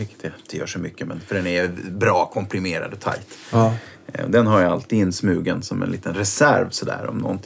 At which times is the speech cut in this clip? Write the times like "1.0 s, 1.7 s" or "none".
none